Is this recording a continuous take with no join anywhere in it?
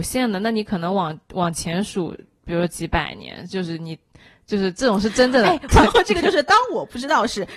no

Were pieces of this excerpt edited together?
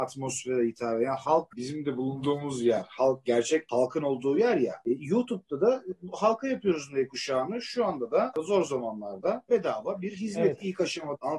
yes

